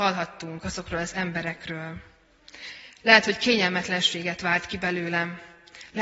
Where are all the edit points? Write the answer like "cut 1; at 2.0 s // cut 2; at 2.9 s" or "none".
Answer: none